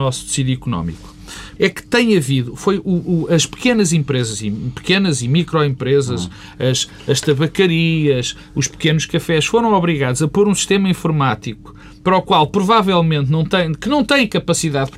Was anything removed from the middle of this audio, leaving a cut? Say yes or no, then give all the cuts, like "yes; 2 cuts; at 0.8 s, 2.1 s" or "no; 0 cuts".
yes; 1 cut; at 1.6 s